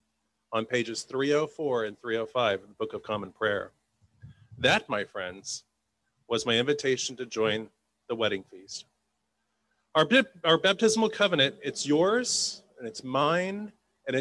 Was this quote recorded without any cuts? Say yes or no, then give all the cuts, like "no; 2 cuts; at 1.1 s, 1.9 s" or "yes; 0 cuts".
yes; 0 cuts